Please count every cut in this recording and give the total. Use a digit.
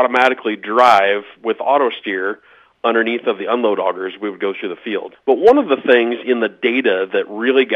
1